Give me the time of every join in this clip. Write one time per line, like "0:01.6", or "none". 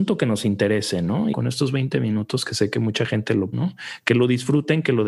0:01.3
0:03.5